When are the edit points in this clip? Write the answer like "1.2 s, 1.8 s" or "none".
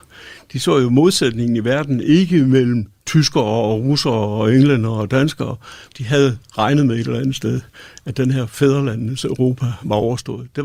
5.9 s